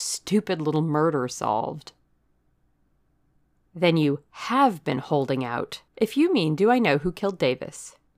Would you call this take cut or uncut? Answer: cut